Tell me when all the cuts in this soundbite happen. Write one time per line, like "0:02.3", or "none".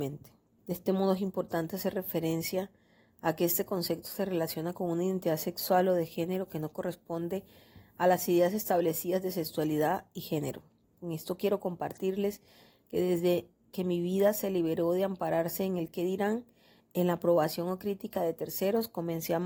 0:10.9